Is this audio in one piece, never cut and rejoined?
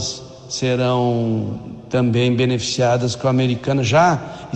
yes; 0 cuts

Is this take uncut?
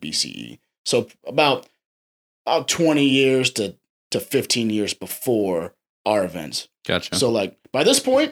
yes; 0 cuts

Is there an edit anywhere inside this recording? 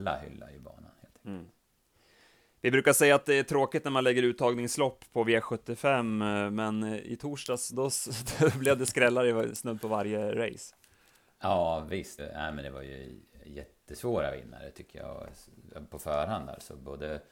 yes; 2 cuts; at 7.7 s, 12.2 s

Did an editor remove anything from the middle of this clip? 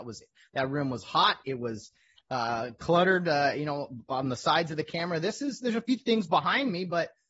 no; 0 cuts

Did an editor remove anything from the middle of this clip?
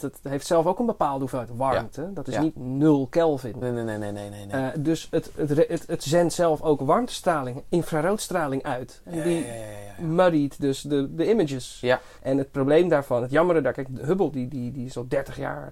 yes; 2 cuts; at 3.6 s, 12.2 s

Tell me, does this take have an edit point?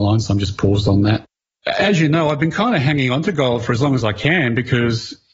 no; 0 cuts

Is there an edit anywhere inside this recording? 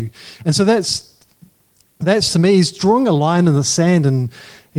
no; 0 cuts

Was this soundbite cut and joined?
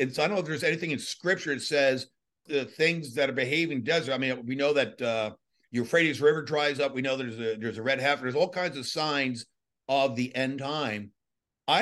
yes; 1 cut; at 2.5 s

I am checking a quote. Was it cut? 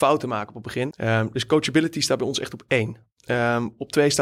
yes; 1 cut; at 0.9 s

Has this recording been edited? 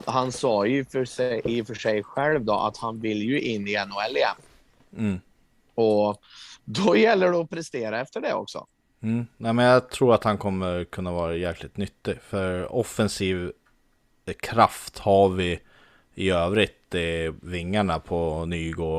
no; 0 cuts

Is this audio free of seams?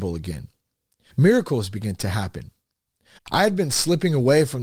no; 1 cut; at 3.2 s

